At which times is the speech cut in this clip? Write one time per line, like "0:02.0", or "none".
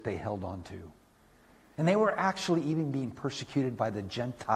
0:01.7